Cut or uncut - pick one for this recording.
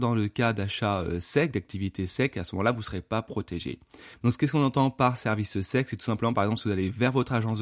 cut